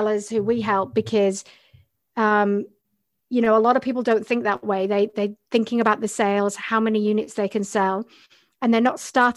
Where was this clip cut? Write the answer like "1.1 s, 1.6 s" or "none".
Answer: none